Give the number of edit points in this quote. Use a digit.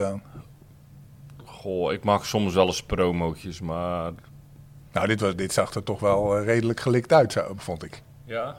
1